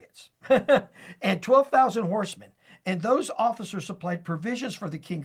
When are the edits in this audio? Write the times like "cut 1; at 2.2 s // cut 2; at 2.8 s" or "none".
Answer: none